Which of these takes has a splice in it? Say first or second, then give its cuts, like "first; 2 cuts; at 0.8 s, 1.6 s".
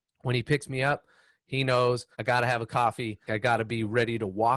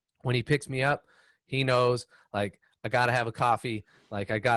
first; 2 cuts; at 2.1 s, 3.3 s